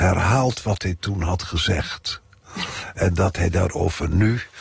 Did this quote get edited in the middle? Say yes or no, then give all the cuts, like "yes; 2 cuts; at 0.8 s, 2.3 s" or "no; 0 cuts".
no; 0 cuts